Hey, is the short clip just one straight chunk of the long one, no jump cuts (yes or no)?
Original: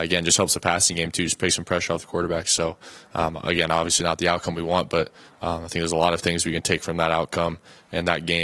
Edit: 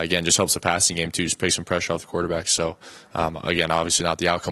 yes